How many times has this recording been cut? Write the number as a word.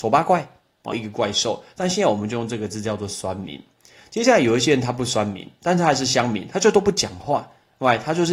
one